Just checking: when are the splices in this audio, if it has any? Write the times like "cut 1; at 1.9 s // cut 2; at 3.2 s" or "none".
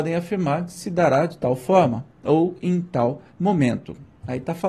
cut 1; at 3.3 s